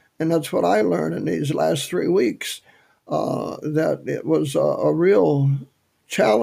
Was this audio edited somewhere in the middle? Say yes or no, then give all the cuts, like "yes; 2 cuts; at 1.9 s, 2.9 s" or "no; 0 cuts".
no; 0 cuts